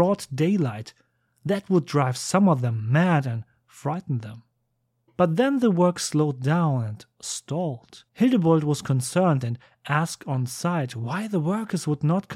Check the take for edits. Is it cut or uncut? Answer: cut